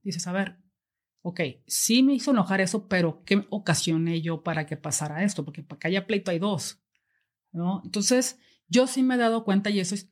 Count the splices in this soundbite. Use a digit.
0